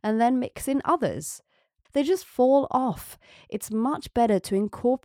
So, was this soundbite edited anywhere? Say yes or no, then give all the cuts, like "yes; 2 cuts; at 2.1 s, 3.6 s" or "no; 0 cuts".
yes; 1 cut; at 1.8 s